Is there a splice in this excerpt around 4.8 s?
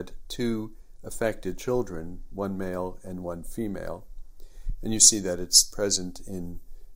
yes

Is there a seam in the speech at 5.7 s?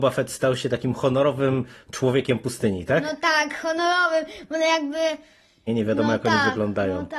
yes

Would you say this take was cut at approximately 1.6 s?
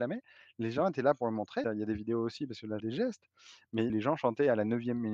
yes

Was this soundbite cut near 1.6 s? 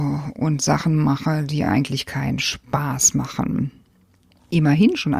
no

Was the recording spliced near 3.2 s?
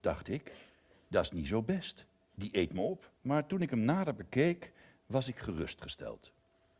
yes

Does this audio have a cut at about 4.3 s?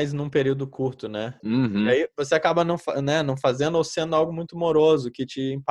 no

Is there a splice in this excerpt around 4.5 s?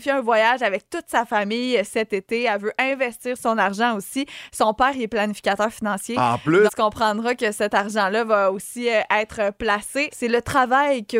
no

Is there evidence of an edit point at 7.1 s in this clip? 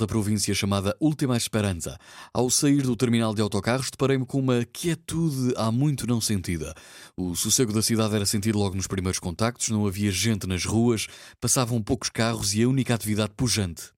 no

